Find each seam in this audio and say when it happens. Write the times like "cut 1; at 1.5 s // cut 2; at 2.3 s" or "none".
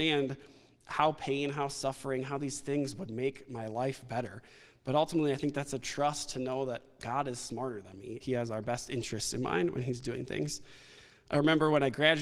cut 1; at 8.2 s